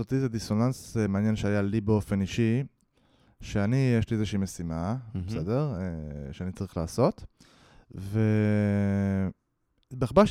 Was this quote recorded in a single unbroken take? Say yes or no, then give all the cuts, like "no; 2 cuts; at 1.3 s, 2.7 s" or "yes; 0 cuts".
yes; 0 cuts